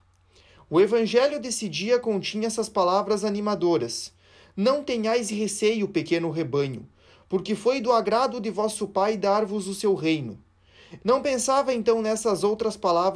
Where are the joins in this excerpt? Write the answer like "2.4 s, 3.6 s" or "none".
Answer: 11.0 s